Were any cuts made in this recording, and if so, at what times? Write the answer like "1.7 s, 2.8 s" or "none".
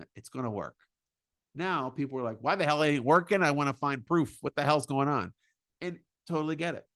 none